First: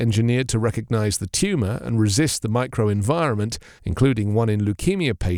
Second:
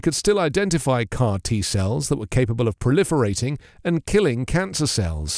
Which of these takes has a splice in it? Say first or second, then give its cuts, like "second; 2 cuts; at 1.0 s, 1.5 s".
first; 1 cut; at 3.8 s